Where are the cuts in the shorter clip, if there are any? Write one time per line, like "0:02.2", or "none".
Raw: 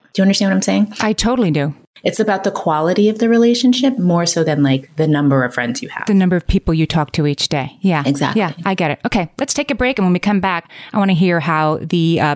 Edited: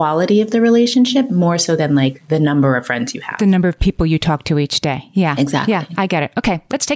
none